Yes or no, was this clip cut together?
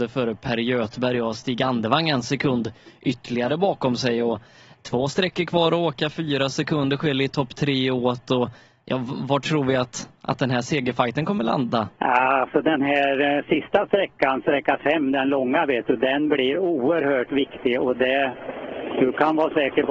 yes